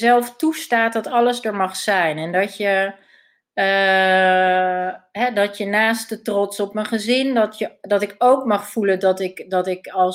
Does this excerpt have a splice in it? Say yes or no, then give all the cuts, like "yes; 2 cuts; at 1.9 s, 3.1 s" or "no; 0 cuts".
no; 0 cuts